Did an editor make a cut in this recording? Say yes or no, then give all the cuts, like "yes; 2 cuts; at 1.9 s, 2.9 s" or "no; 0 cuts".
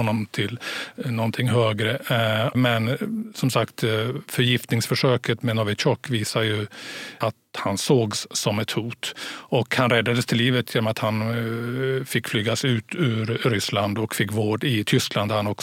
yes; 2 cuts; at 2.5 s, 7.2 s